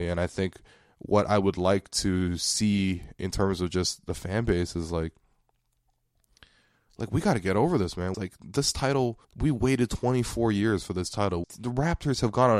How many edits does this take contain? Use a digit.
3